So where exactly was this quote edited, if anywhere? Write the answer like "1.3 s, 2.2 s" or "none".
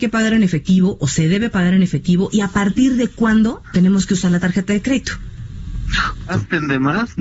6.3 s